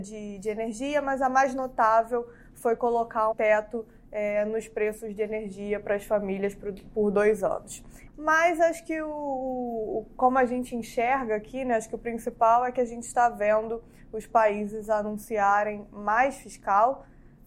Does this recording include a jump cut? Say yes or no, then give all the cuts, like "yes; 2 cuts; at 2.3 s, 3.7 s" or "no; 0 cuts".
yes; 2 cuts; at 3.3 s, 8.1 s